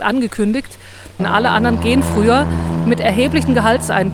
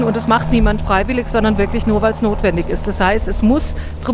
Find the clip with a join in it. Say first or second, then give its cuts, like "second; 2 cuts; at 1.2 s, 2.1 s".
first; 1 cut; at 1.2 s